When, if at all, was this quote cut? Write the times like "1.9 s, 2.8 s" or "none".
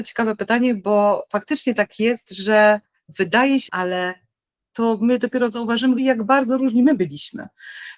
3.7 s, 6.0 s